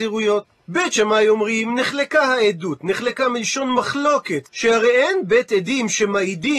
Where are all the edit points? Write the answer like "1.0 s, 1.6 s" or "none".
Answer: 4.5 s